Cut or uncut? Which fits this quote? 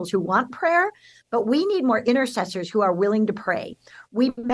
uncut